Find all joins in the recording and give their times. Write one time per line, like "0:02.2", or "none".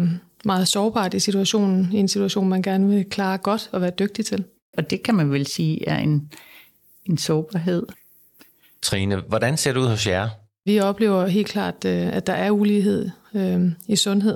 0:04.7